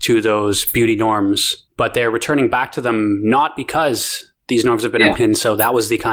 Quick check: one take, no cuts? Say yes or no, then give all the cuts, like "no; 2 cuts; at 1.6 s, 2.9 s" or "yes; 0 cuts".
no; 1 cut; at 5.1 s